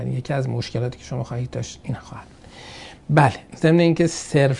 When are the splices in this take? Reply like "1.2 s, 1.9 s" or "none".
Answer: 3.5 s